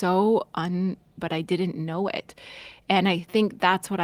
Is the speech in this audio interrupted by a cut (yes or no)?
yes